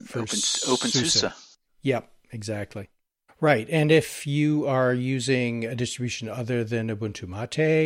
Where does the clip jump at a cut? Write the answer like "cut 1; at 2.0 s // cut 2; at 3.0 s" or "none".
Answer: cut 1; at 3.3 s